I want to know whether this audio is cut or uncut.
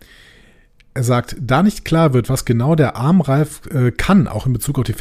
uncut